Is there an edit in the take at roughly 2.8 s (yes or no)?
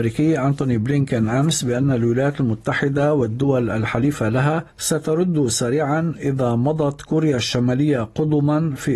no